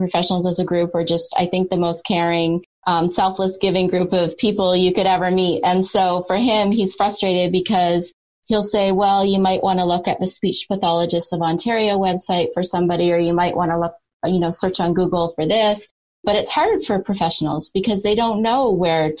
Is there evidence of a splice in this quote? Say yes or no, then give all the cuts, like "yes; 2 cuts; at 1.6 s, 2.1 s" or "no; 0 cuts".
no; 0 cuts